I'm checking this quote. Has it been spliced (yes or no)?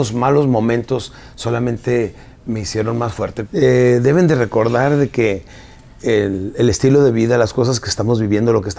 yes